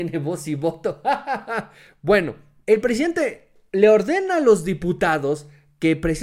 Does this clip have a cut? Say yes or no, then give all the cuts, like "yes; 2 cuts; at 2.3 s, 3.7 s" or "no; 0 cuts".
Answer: yes; 1 cut; at 2.6 s